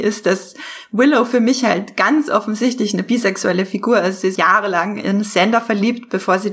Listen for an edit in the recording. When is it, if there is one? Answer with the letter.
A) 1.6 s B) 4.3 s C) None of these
B